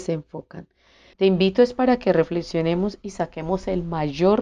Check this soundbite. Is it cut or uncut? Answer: cut